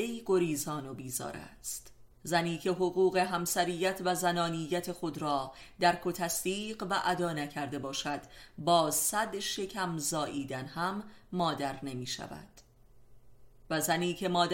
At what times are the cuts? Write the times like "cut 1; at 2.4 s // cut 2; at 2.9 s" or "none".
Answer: cut 1; at 2.1 s